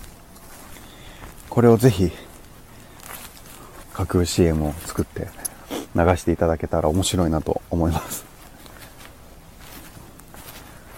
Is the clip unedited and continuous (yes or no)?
no